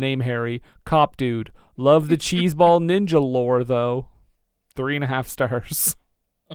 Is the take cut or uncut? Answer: uncut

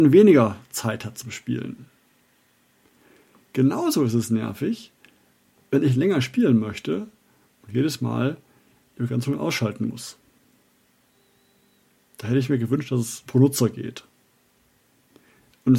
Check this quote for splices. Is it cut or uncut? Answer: cut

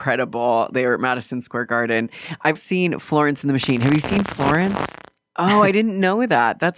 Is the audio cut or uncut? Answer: cut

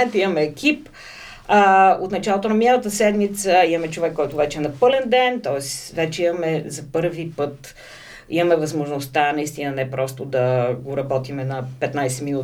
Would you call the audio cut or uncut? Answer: uncut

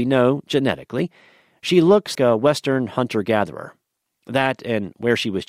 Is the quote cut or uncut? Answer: cut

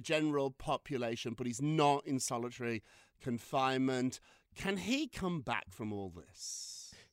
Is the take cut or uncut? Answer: uncut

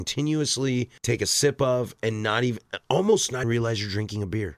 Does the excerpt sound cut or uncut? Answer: cut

